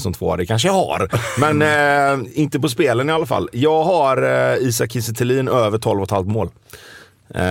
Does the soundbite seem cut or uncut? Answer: uncut